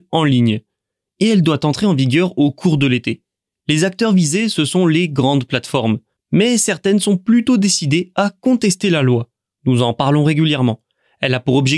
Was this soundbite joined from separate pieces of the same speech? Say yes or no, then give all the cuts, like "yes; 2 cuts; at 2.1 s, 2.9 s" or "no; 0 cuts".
yes; 2 cuts; at 6.2 s, 9.5 s